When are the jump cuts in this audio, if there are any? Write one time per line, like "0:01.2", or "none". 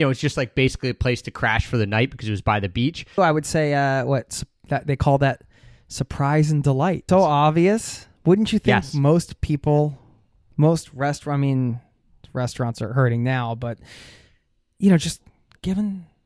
0:03.2
0:07.1